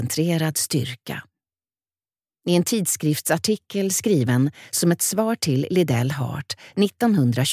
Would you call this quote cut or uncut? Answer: uncut